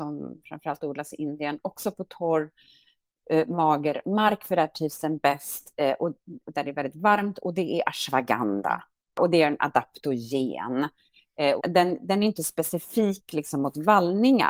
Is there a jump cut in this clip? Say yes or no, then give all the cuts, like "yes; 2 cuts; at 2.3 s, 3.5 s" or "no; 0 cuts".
yes; 1 cut; at 11.6 s